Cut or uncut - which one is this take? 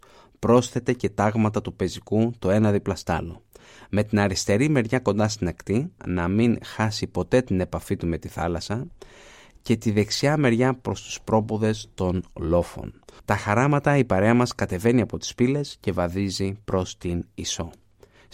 cut